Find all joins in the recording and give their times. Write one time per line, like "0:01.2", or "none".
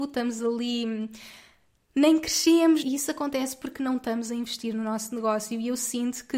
0:02.8